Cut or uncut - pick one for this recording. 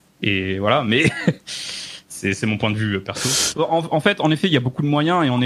cut